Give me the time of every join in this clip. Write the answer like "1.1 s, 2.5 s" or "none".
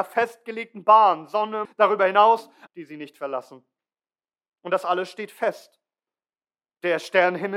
1.6 s, 2.7 s